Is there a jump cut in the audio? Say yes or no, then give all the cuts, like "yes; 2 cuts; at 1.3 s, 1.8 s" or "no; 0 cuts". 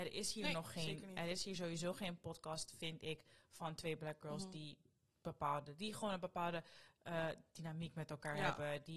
no; 0 cuts